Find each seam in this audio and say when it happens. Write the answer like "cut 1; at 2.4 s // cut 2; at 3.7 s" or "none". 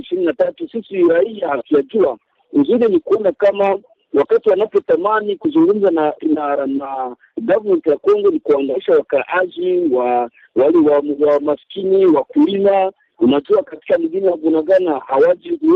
none

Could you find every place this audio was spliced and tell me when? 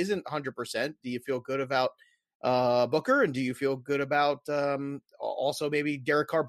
none

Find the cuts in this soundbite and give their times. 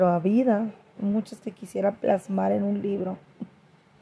cut 1; at 1.0 s

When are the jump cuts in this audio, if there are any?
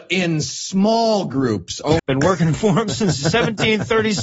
cut 1; at 2.0 s

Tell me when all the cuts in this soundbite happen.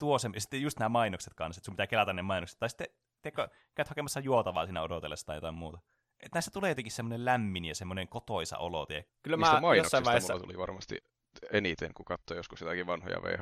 cut 1; at 9.1 s

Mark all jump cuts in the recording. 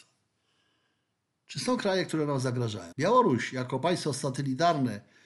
cut 1; at 2.9 s

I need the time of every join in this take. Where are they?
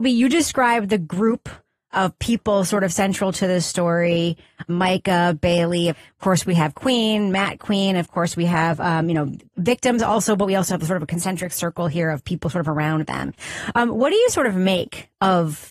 cut 1; at 5.9 s

